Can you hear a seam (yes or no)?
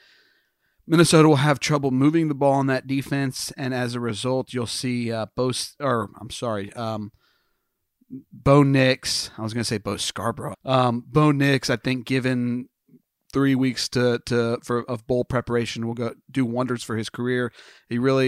yes